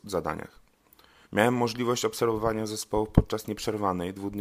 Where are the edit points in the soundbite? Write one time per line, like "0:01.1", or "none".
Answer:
0:01.2